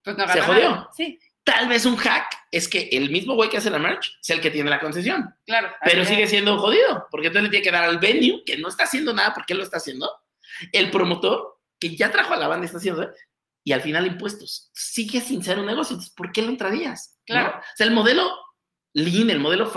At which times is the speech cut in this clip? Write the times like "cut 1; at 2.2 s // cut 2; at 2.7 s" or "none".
none